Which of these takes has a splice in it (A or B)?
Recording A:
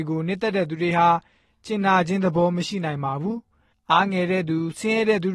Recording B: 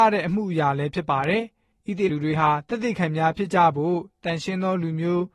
B